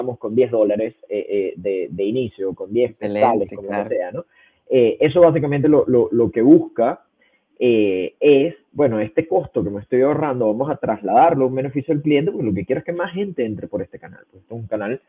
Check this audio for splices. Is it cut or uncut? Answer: uncut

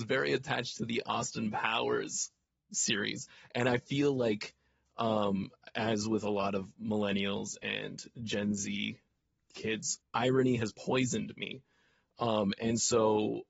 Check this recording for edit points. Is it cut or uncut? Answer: cut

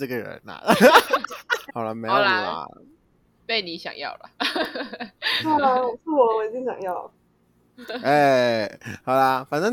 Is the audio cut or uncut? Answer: cut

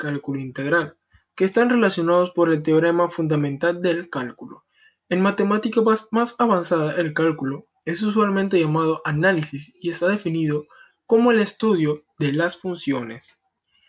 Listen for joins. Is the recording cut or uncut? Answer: uncut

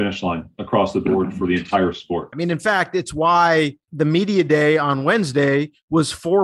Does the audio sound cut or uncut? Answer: cut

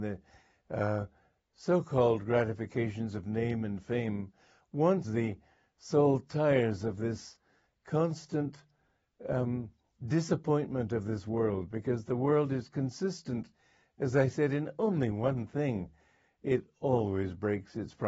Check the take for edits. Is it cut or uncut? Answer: cut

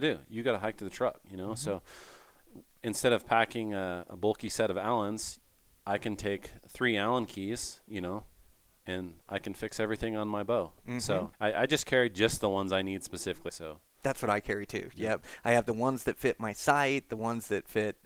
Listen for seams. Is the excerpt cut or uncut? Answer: cut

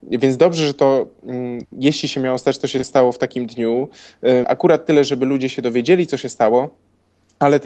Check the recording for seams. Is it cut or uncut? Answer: cut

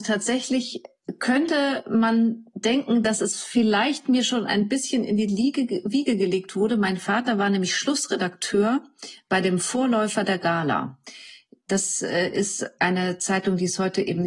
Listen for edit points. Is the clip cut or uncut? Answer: uncut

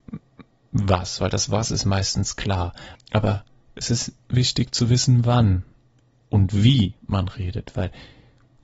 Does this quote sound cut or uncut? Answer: cut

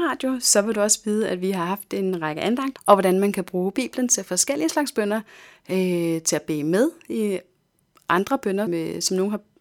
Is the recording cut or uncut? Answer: cut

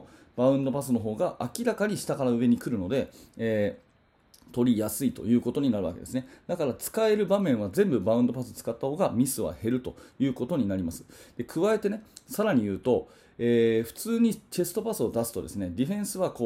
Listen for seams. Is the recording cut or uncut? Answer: uncut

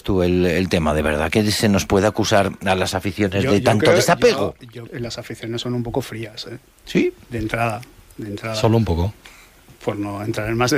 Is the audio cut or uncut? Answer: cut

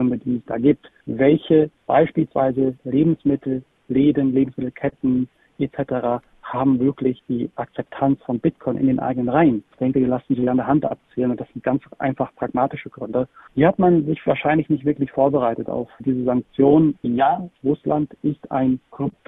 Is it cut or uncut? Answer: cut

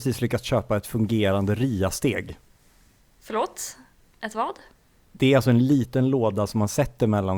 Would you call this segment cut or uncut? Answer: uncut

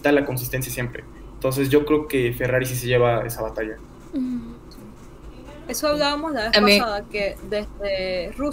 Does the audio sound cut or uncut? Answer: uncut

